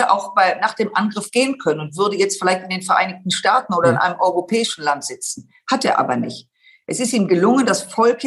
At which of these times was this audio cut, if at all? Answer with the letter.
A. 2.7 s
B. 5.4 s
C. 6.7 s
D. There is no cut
D